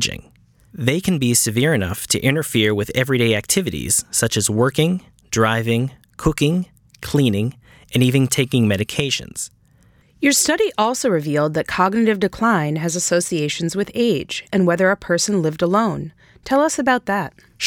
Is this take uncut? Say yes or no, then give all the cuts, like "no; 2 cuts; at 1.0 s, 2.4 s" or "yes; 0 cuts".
no; 2 cuts; at 10.0 s, 14.5 s